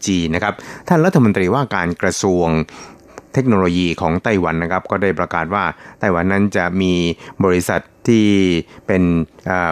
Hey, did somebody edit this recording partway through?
no; 0 cuts

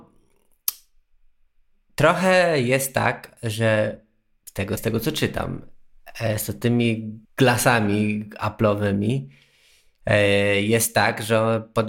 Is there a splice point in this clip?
yes; 2 cuts; at 4.8 s, 7.2 s

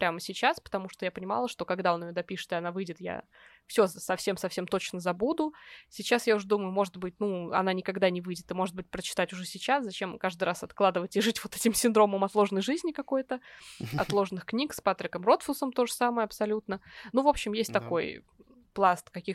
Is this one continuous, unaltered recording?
yes; 0 cuts

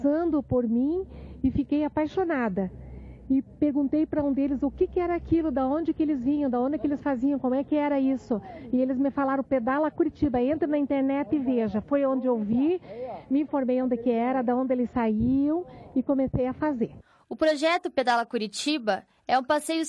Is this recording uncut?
yes; 0 cuts

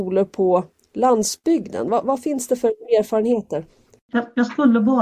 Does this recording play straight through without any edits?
yes; 0 cuts

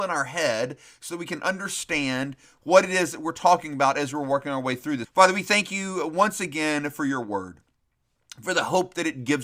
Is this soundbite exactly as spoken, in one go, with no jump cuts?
no; 1 cut; at 5.0 s

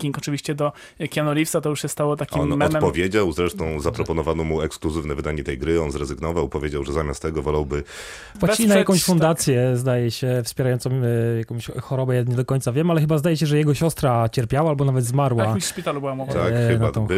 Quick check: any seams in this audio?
no; 0 cuts

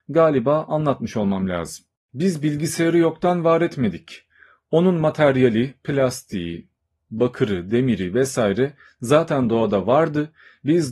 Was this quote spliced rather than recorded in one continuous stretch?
no; 0 cuts

